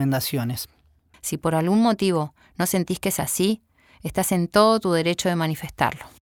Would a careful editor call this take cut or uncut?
cut